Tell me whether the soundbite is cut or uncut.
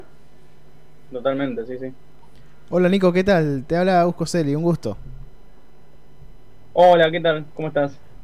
uncut